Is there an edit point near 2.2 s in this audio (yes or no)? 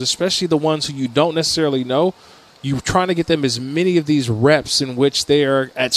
no